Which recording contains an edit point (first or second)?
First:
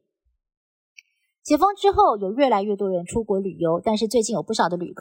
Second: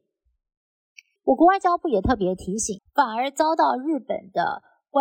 second